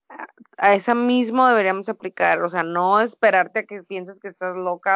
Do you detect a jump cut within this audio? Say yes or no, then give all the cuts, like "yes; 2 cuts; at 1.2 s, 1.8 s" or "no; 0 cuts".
no; 0 cuts